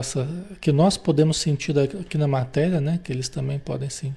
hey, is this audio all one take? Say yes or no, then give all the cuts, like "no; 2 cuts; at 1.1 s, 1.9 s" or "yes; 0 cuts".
yes; 0 cuts